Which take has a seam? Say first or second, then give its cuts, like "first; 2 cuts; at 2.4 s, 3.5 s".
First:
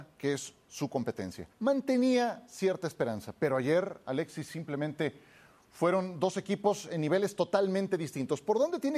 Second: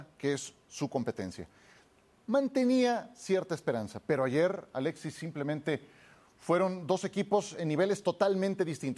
first; 1 cut; at 1.5 s